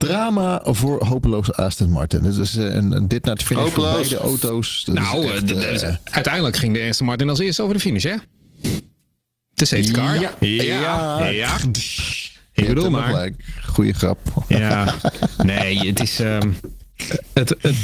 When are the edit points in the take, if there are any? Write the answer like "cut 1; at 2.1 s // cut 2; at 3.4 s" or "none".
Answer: none